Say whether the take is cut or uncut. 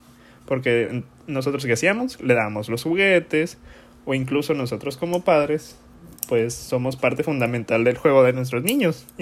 uncut